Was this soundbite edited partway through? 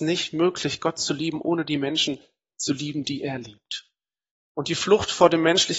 yes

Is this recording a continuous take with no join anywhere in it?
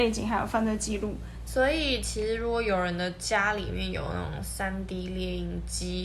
no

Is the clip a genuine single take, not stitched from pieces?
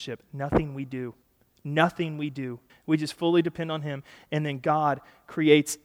no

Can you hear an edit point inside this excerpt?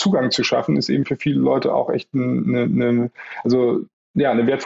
no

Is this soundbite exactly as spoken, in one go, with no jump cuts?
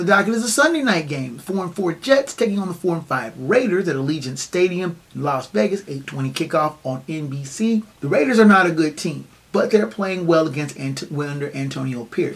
no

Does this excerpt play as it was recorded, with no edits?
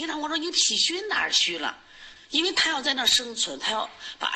no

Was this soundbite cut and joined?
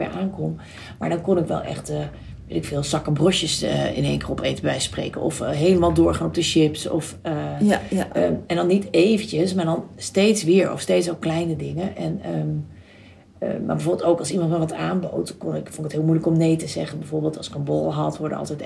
no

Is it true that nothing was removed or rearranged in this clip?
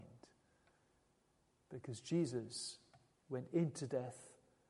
no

